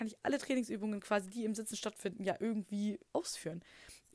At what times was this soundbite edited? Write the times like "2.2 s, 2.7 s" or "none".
3.1 s

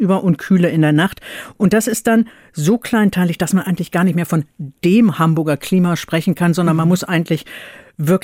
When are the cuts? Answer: none

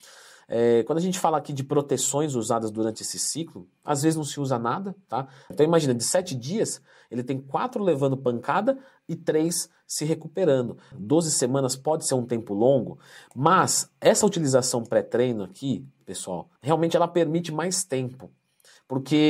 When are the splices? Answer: 5.5 s, 10.9 s, 16.6 s

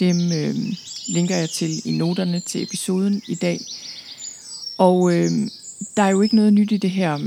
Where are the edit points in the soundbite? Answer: none

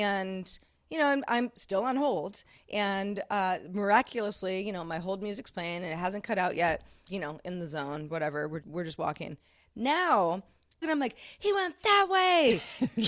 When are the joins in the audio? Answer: 7.1 s, 8.6 s, 10.8 s

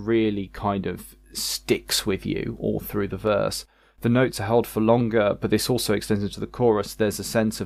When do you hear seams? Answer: none

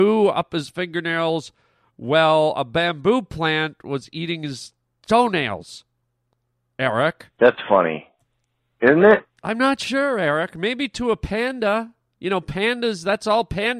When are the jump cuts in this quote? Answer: none

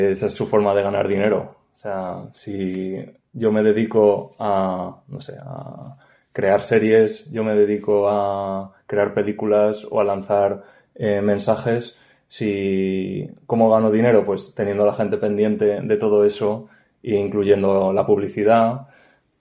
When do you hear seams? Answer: none

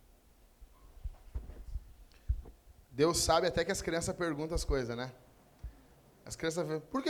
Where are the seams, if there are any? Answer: none

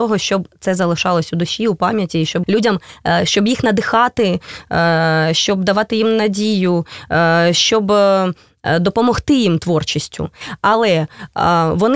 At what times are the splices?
2.4 s

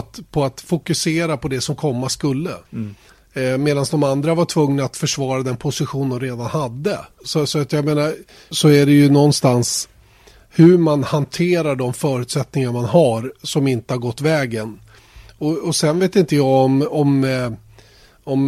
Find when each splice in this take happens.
2.7 s, 7.2 s, 8.5 s

